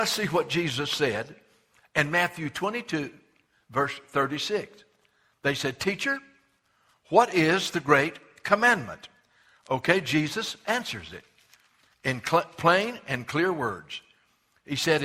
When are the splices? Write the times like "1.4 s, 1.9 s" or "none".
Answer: none